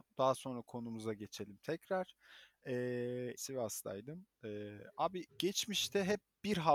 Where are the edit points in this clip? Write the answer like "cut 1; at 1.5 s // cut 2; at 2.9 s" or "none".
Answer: cut 1; at 3.4 s // cut 2; at 5.3 s